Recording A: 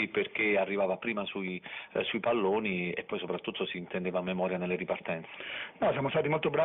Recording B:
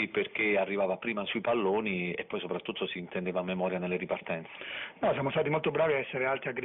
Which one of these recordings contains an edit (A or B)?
B